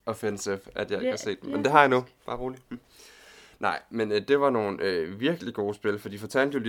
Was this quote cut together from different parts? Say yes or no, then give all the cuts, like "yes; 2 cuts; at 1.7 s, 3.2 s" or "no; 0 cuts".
no; 0 cuts